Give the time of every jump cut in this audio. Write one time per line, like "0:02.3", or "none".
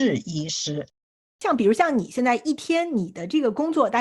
none